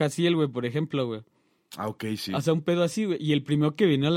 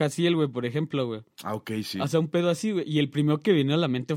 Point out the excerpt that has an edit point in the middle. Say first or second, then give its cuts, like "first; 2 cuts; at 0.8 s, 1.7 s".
second; 1 cut; at 1.3 s